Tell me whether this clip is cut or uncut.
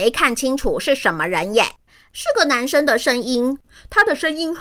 uncut